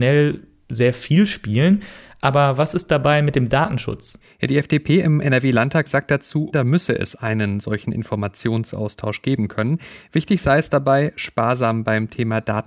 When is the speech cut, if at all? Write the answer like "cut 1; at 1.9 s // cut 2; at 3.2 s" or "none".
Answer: cut 1; at 6.5 s